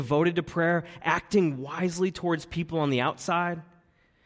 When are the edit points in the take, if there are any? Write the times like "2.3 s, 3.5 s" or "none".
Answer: none